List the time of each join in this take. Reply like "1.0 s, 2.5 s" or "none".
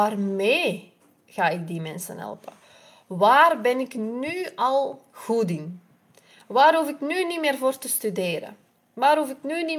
none